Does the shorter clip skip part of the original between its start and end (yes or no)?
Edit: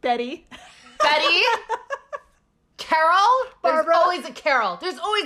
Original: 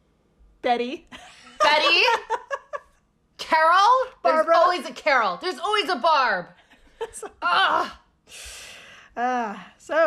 no